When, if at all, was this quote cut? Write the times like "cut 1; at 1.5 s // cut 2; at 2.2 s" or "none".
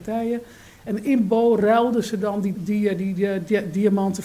cut 1; at 2.5 s